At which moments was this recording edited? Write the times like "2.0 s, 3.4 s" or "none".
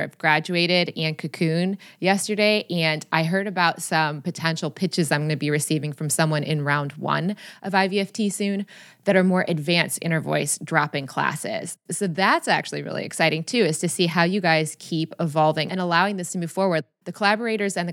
15.7 s